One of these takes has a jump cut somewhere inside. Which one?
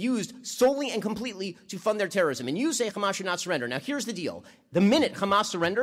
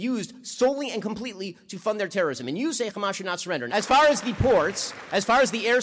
second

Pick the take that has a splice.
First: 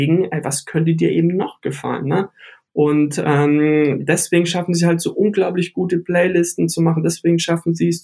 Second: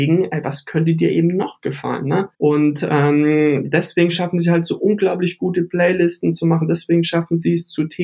second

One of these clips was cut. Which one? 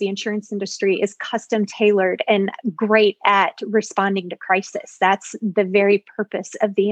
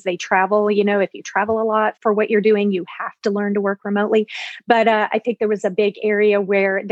second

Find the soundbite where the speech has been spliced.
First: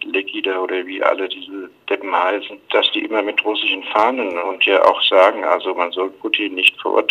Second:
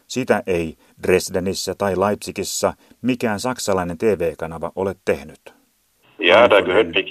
second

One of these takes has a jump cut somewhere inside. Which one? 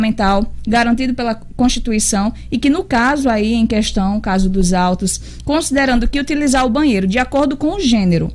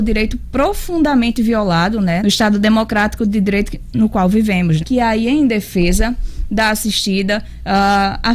second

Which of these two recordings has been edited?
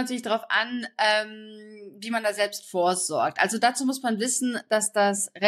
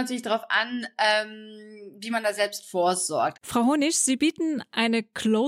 second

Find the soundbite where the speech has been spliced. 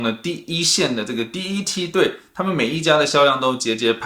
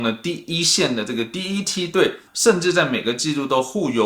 second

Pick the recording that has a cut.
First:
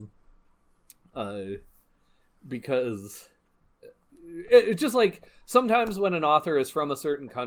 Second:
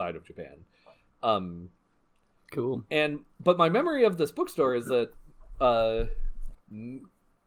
second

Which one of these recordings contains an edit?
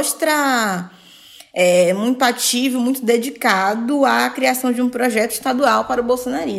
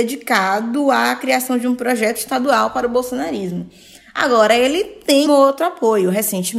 second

